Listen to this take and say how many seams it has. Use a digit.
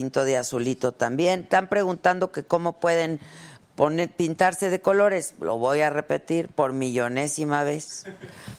0